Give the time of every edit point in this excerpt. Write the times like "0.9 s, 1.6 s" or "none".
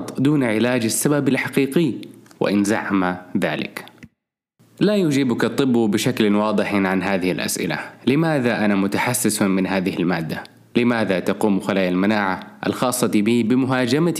10.7 s